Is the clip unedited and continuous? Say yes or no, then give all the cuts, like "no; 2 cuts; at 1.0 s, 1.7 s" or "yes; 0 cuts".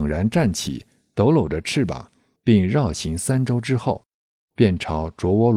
no; 1 cut; at 2.4 s